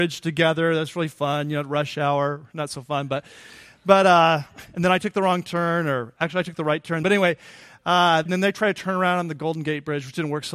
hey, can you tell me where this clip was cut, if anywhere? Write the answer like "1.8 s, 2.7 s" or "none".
7.0 s, 8.3 s